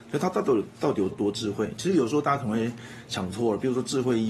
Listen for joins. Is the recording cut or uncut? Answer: cut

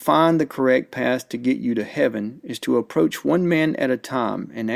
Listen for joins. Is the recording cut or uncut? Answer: uncut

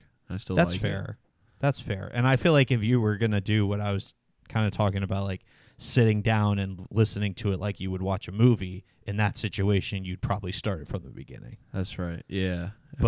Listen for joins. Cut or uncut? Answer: uncut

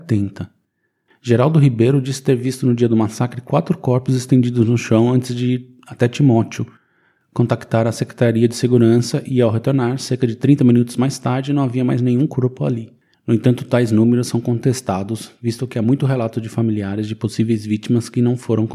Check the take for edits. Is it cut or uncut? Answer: cut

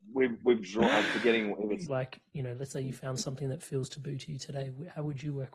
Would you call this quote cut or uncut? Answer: cut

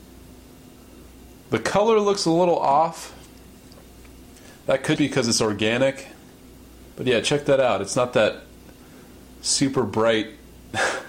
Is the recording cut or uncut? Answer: cut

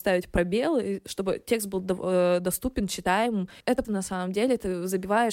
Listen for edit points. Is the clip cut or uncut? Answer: cut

